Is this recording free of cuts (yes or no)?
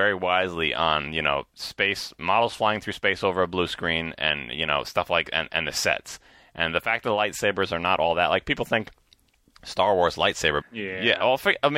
no